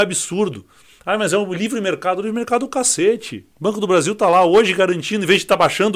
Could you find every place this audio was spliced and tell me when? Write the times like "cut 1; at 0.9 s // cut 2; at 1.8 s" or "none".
cut 1; at 3.5 s